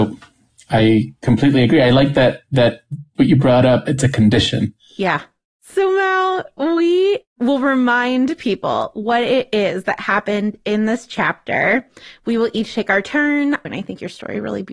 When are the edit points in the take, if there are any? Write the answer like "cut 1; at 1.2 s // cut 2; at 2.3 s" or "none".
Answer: cut 1; at 13.6 s